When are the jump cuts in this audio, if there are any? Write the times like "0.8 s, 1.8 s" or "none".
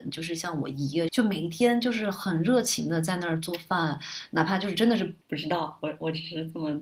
1.1 s, 5.2 s